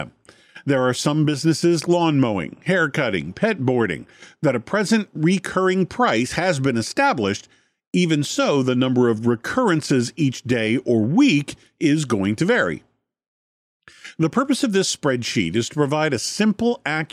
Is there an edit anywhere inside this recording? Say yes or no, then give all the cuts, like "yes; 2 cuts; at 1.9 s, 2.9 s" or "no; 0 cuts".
yes; 1 cut; at 1.8 s